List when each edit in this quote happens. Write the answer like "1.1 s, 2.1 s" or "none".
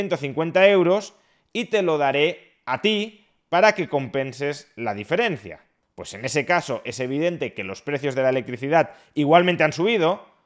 none